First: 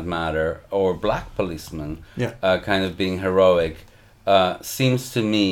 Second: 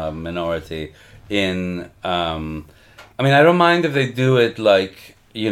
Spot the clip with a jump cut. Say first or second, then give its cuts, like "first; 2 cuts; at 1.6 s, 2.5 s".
second; 1 cut; at 3.1 s